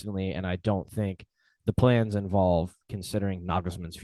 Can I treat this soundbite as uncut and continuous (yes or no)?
yes